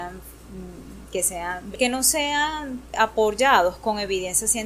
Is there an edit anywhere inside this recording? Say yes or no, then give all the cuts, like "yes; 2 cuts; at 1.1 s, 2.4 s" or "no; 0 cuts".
yes; 1 cut; at 1.7 s